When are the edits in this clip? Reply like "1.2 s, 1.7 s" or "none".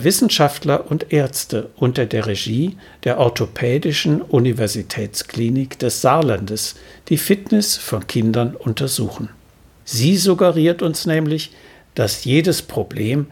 9.8 s